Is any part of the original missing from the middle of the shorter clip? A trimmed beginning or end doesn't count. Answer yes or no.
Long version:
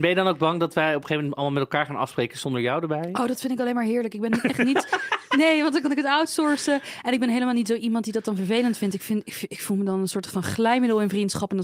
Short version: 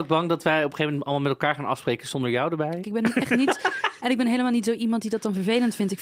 yes